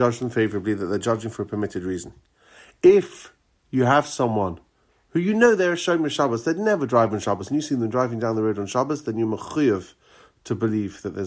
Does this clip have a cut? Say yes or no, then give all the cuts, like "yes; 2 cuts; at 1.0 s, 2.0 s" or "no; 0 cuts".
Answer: no; 0 cuts